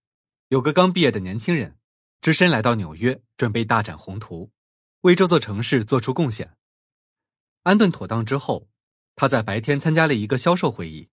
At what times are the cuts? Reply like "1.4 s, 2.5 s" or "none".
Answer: 7.6 s